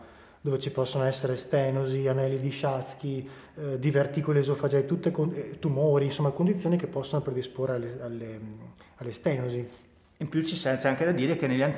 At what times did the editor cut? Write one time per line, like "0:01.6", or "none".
none